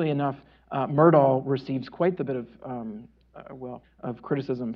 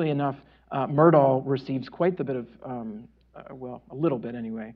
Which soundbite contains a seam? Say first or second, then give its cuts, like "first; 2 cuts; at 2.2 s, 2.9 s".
first; 1 cut; at 3.8 s